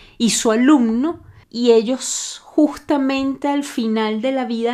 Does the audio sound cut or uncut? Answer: cut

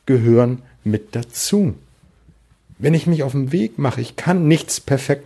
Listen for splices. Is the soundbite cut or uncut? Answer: uncut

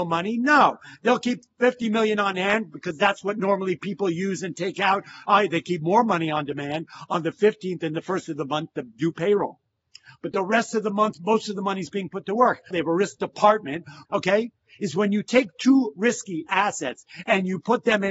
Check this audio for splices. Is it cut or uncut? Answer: cut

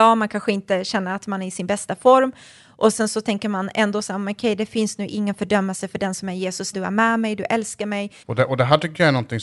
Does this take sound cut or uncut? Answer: cut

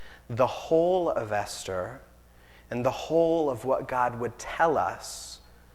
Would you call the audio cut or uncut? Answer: uncut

